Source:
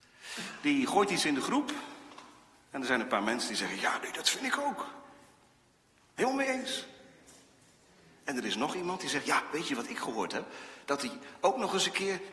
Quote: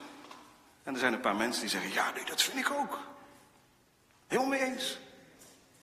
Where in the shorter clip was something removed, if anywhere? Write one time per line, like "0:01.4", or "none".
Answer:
none